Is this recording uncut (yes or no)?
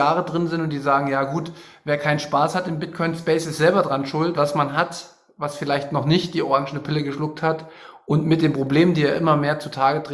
no